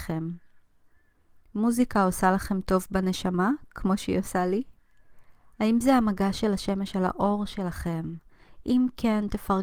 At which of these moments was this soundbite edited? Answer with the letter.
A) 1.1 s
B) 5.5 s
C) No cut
B